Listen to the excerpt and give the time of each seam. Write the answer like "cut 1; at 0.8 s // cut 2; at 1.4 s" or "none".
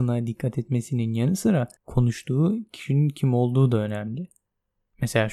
cut 1; at 1.8 s